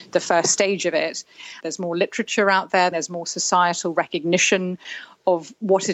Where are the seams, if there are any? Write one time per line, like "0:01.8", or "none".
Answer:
0:01.6
0:02.9